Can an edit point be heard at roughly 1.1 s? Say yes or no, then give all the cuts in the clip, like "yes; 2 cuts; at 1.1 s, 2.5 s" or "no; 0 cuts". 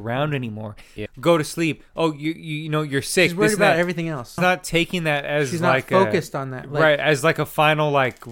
yes; 2 cuts; at 1.1 s, 4.4 s